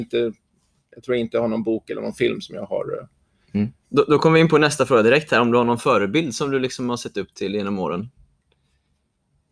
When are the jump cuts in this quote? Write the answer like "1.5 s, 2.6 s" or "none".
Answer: 3.8 s